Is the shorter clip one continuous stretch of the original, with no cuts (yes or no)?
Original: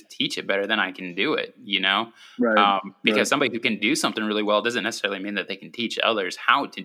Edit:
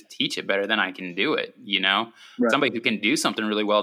no